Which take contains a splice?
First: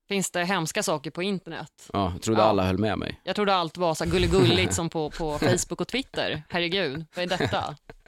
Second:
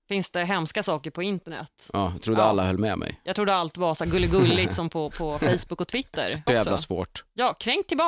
second; 1 cut; at 6.5 s

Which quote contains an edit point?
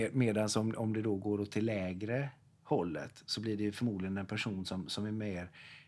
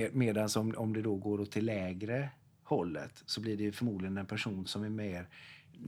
second; 1 cut; at 4.6 s

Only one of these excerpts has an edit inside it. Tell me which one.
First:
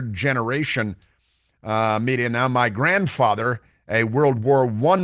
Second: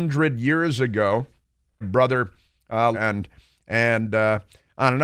second; 2 cuts; at 1.8 s, 2.9 s

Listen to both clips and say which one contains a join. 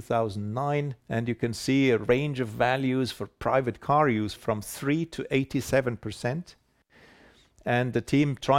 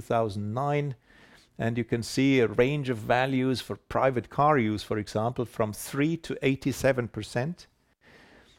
first; 2 cuts; at 1.0 s, 4.4 s

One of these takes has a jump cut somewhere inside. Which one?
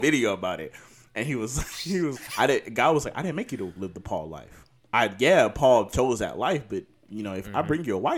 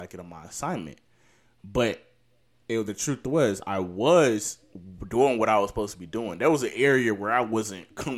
first; 1 cut; at 2.2 s

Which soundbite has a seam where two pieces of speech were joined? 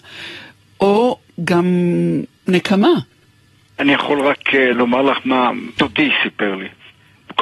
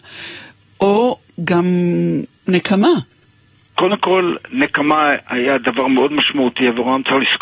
second; 1 cut; at 3.7 s

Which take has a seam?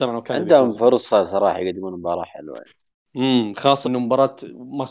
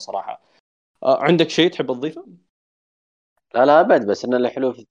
first; 1 cut; at 3.8 s

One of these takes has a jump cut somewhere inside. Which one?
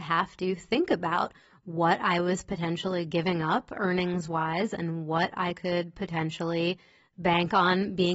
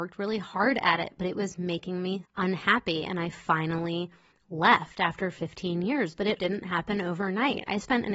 second; 2 cuts; at 2.2 s, 6.4 s

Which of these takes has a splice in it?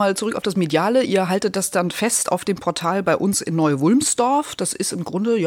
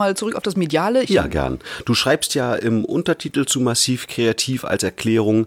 second; 1 cut; at 1.0 s

